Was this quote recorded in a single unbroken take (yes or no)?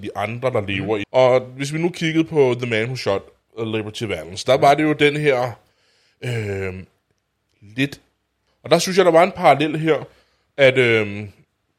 no